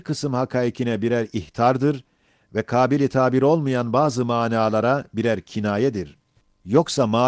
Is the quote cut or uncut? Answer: uncut